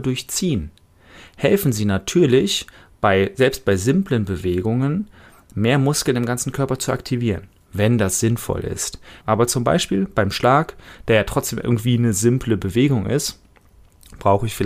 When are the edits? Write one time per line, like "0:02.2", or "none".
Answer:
0:09.2